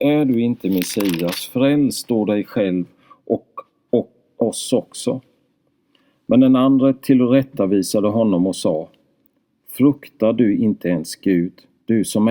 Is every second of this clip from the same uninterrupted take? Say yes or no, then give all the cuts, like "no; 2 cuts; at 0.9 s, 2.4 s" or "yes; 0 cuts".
yes; 0 cuts